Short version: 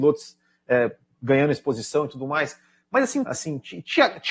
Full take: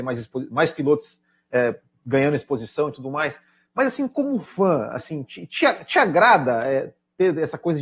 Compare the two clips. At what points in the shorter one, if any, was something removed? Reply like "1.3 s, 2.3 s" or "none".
3.2 s

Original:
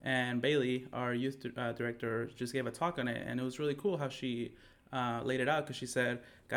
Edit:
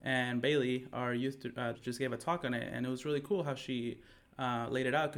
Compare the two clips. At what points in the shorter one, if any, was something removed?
1.7 s

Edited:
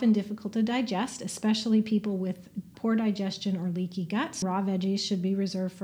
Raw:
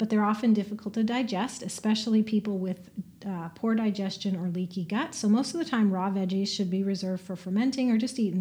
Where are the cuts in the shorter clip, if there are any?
2.7 s, 4.4 s

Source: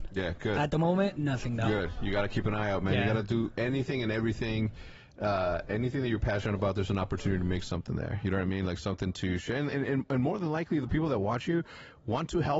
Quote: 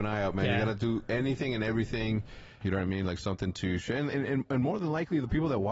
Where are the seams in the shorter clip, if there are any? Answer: 2.6 s

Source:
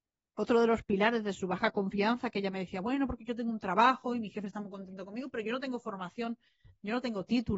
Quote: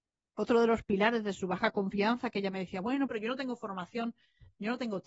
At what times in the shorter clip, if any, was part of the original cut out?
3.1 s

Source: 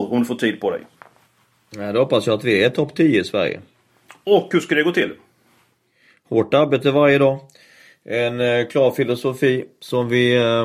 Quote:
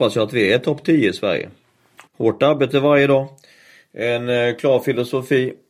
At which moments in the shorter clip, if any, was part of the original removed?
2.1 s

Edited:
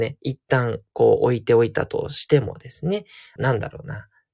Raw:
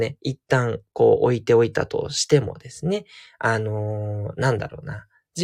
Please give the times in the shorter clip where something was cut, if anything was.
3.4 s

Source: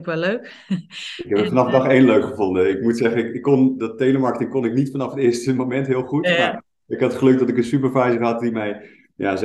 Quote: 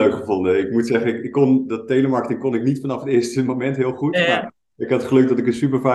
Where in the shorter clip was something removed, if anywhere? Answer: none

